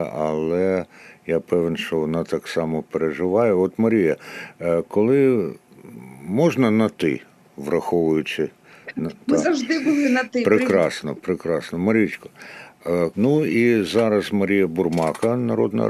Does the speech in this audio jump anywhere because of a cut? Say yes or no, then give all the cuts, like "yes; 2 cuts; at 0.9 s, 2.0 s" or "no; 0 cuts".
yes; 1 cut; at 13.1 s